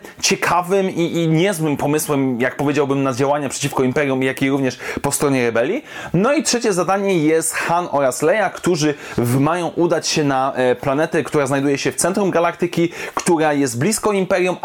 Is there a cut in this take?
no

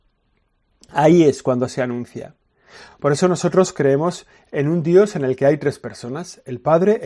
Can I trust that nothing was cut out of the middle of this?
yes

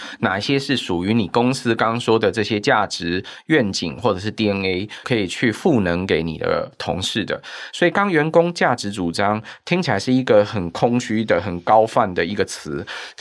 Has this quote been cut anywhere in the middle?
yes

